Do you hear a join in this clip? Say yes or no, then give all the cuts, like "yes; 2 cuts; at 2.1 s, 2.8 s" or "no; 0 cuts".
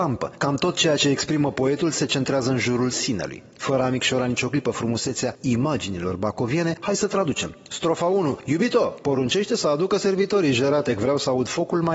no; 0 cuts